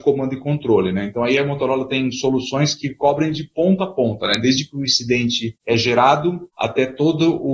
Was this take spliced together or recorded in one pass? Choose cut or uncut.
uncut